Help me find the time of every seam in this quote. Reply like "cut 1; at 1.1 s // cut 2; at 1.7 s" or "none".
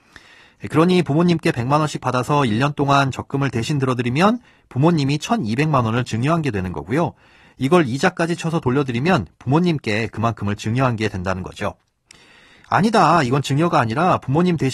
none